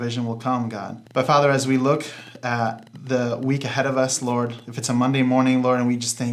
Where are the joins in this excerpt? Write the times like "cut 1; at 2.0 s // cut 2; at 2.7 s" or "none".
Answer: cut 1; at 1.1 s

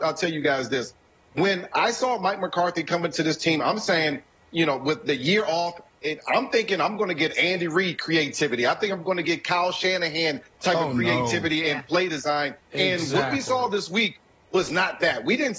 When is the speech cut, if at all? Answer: none

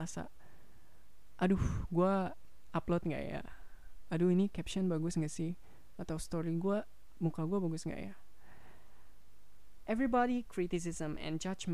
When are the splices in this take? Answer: none

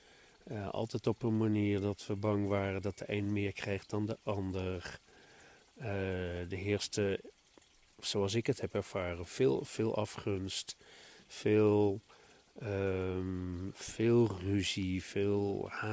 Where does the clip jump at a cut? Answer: none

